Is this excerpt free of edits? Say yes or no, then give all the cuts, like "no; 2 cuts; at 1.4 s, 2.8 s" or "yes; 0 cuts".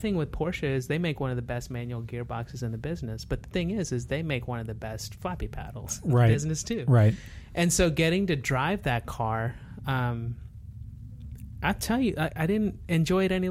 yes; 0 cuts